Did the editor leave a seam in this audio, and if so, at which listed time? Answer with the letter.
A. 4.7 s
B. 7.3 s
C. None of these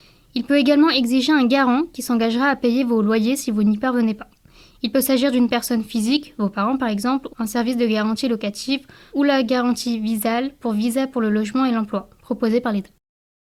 B